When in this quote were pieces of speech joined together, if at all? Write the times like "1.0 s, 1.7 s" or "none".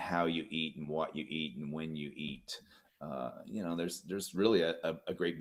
none

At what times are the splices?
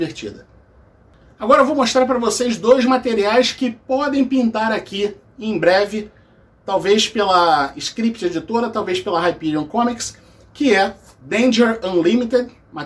none

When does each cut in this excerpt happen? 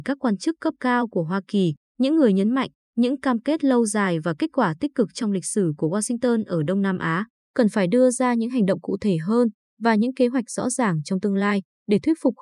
7.4 s

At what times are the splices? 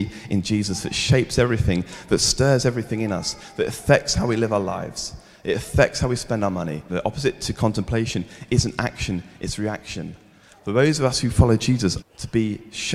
6.9 s, 10.5 s, 12.0 s

